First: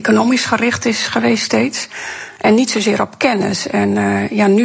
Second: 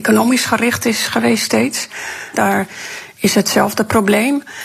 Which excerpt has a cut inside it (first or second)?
second